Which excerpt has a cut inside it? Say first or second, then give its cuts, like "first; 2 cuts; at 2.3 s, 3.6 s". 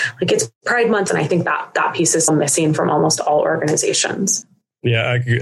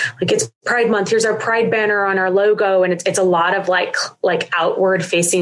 first; 2 cuts; at 1.1 s, 2.3 s